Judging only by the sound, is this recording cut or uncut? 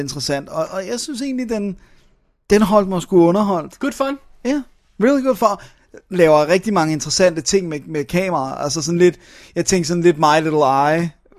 uncut